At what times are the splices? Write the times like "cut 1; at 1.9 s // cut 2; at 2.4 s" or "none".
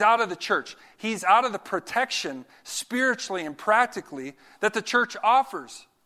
none